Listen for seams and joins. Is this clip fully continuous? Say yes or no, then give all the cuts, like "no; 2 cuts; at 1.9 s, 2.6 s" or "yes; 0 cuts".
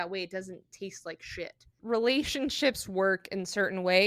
no; 1 cut; at 1.8 s